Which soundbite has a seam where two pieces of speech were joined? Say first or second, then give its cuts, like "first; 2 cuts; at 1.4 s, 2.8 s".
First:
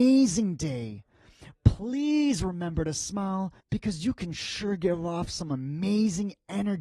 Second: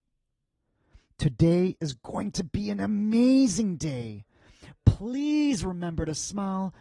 first; 1 cut; at 3.6 s